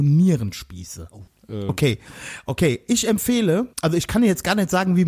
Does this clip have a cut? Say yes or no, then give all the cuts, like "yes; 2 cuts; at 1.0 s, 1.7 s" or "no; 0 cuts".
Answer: yes; 2 cuts; at 1.3 s, 3.7 s